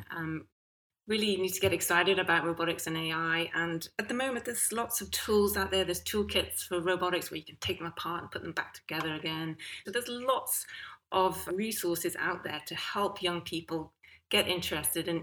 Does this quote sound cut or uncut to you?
cut